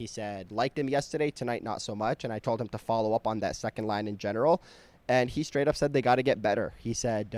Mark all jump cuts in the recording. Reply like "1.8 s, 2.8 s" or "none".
none